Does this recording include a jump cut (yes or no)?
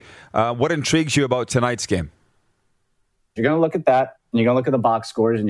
yes